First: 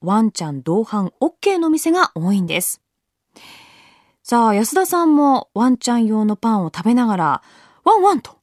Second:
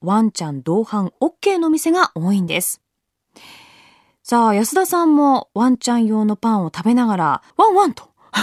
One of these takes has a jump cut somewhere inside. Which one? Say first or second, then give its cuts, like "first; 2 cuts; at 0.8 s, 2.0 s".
second; 1 cut; at 7.5 s